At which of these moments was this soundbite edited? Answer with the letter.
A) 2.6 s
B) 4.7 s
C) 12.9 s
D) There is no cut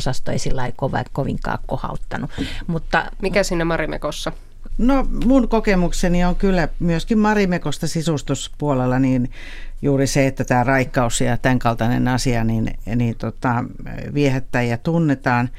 B